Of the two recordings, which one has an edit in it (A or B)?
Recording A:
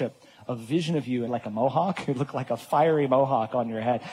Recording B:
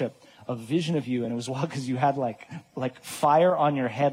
A